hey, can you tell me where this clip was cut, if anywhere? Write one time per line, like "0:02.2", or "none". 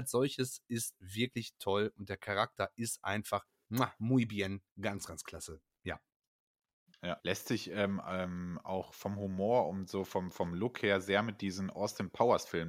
0:07.2